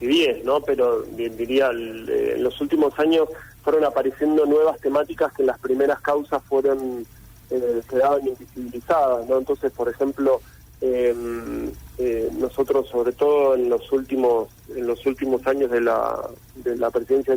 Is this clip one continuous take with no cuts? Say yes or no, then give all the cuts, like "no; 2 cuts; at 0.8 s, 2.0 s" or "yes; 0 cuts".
yes; 0 cuts